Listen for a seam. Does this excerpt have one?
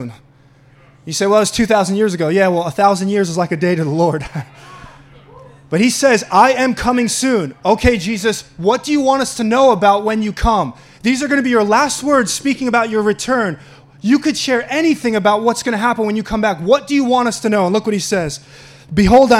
no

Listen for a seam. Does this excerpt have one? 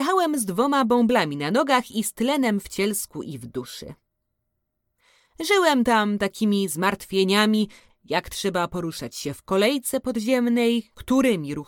no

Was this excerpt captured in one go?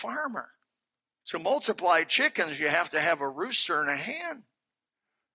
no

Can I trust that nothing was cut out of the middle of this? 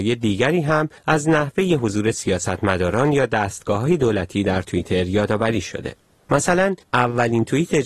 no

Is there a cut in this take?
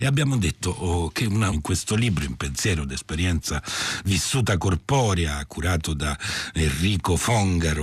yes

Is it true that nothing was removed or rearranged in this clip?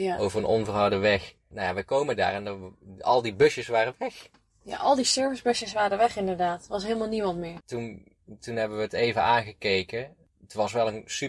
no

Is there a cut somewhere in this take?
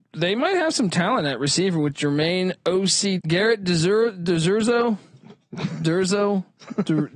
yes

